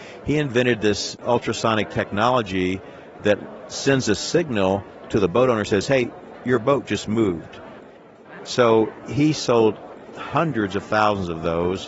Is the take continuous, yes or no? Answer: no